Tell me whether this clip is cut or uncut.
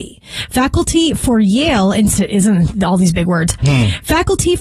uncut